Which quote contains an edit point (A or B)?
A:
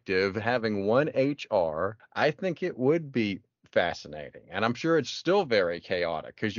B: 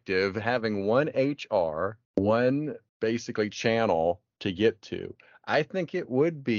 A